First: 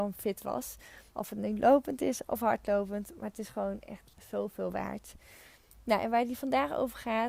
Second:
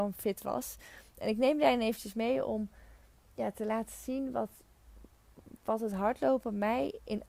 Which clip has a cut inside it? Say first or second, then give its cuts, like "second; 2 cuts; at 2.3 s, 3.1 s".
first; 1 cut; at 1.1 s